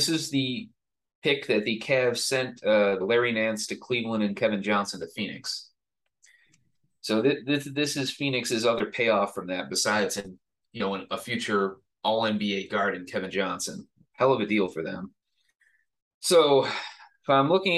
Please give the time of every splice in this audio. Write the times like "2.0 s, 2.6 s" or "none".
3.0 s